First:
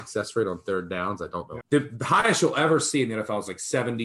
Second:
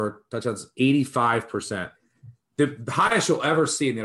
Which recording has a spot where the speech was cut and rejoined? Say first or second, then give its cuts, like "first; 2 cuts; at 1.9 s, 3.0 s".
first; 1 cut; at 1.6 s